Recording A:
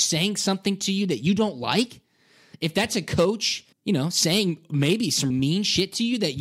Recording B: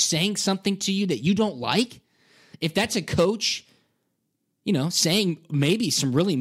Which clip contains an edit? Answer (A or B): A